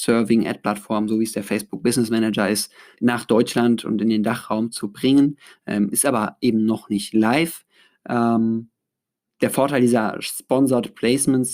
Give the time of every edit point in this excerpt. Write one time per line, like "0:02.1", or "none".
0:02.9